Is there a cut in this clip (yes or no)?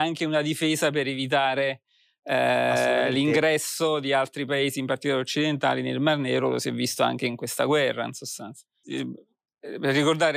yes